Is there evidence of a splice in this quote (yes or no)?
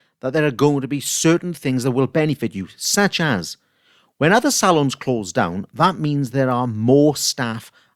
no